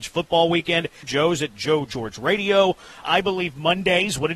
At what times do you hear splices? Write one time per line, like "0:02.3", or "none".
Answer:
0:01.0
0:03.0